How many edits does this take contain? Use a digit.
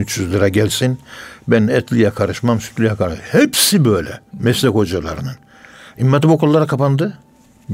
1